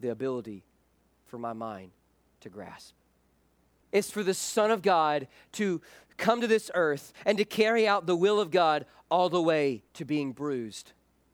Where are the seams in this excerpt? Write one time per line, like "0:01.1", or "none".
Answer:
0:03.9
0:09.9